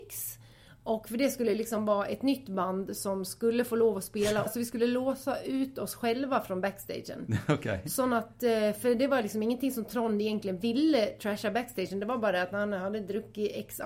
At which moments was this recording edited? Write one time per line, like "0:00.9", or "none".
0:04.5